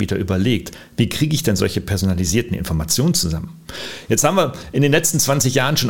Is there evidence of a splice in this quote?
no; 0 cuts

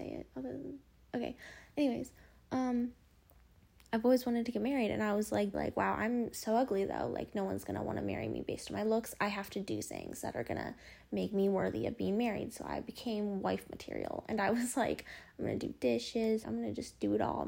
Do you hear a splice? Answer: yes; 2 cuts; at 5.5 s, 16.4 s

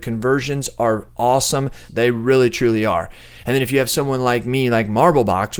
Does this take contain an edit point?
yes; 1 cut; at 1.9 s

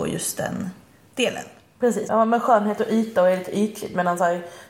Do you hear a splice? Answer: yes; 1 cut; at 2.1 s

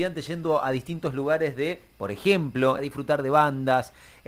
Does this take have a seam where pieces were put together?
yes; 1 cut; at 2.8 s

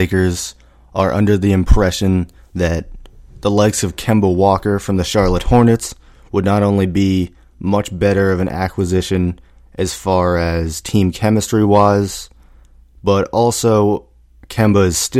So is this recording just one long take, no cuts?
yes; 0 cuts

